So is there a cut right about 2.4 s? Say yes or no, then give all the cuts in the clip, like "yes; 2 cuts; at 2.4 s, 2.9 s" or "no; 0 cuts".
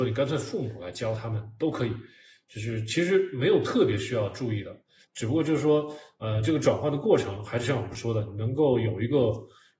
no; 1 cut; at 5.0 s